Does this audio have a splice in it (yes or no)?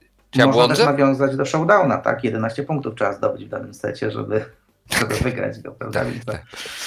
no